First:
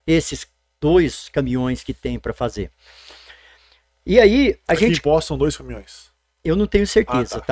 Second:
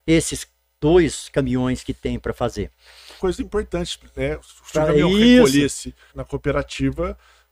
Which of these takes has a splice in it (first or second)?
second